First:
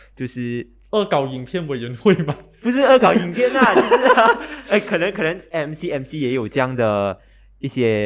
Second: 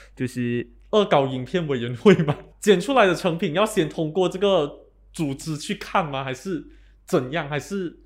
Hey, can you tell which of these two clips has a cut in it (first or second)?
second